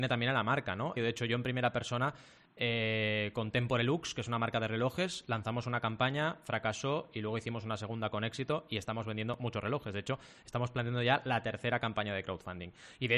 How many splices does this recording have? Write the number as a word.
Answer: one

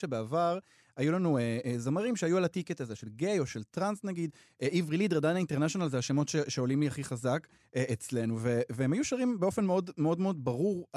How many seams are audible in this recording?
zero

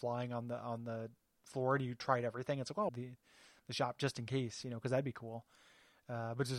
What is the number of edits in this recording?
one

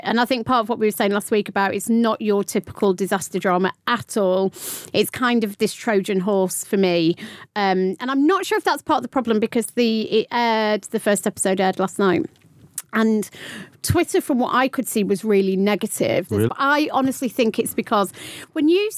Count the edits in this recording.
one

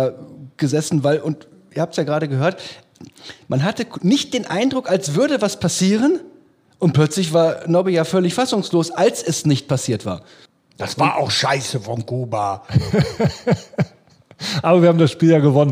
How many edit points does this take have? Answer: zero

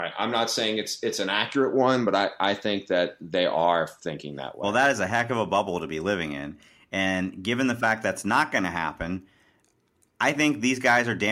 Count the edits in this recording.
zero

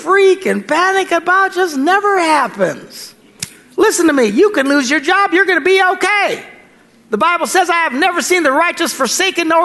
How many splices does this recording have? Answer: zero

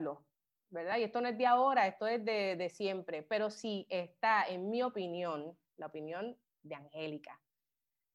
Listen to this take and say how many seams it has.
zero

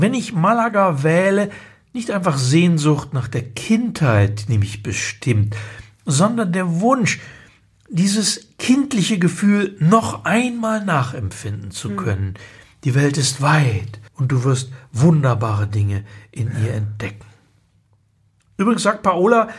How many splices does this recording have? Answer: one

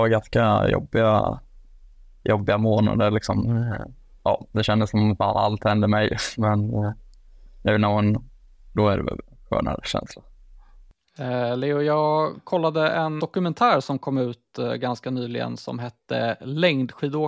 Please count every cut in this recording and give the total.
two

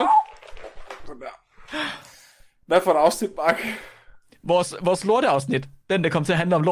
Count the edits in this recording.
zero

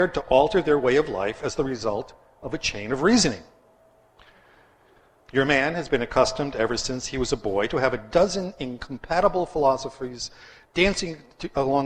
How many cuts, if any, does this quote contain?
one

